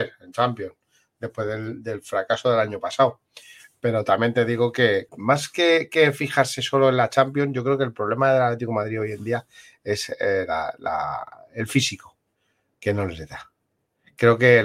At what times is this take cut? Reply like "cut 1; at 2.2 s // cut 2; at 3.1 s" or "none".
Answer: cut 1; at 5.1 s